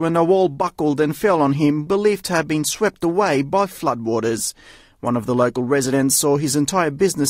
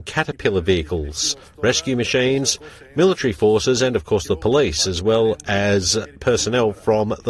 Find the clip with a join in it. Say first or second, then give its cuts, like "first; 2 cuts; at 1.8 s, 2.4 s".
first; 1 cut; at 1.9 s